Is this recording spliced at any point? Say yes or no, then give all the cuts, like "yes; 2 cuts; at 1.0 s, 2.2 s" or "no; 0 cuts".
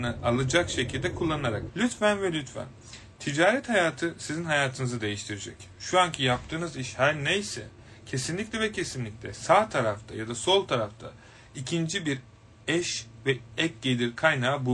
yes; 1 cut; at 1.7 s